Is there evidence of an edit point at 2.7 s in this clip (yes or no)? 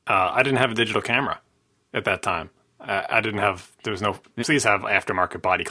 no